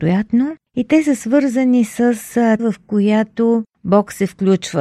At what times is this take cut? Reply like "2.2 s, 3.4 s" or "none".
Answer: 2.6 s